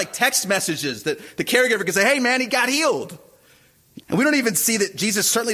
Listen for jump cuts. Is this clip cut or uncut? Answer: cut